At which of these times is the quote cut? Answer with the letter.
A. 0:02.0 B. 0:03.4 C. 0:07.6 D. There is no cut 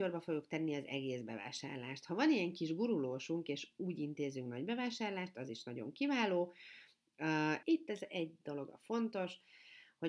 C